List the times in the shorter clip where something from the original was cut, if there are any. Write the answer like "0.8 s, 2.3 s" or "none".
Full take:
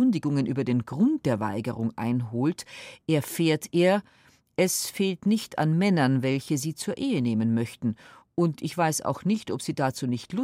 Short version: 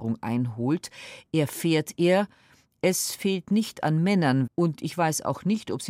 4.5 s